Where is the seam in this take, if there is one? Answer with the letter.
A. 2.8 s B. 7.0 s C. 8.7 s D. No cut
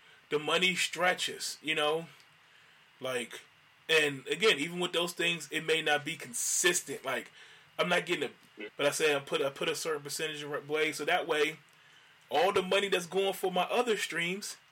C